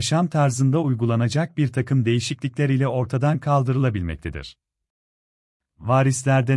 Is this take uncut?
yes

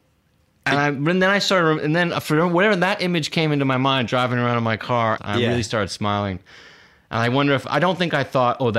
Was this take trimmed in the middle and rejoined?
yes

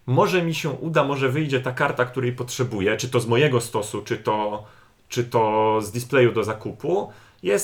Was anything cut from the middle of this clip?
no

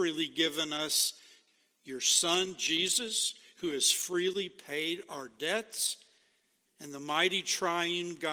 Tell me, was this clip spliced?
yes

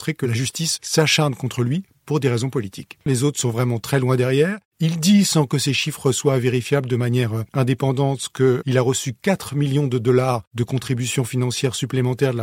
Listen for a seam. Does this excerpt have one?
yes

